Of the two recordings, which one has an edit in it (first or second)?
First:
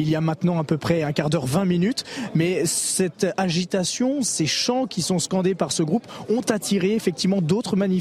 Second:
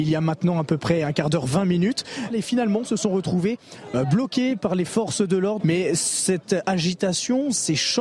second